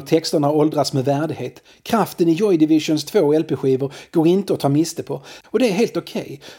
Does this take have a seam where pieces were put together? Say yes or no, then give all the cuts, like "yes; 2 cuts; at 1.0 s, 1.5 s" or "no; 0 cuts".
yes; 1 cut; at 5.4 s